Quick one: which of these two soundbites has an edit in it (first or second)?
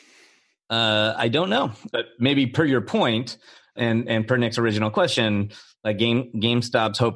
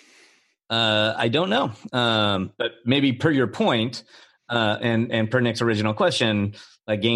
first